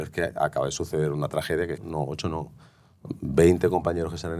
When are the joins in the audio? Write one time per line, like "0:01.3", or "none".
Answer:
0:01.8